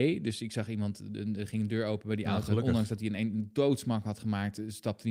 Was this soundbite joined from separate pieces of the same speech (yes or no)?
no